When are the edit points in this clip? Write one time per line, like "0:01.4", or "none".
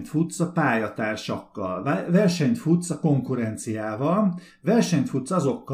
none